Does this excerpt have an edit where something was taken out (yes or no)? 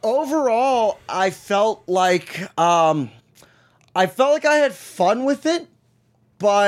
no